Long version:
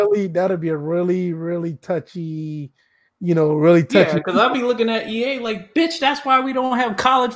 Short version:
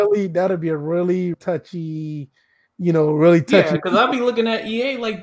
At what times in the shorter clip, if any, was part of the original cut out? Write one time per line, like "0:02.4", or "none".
0:01.3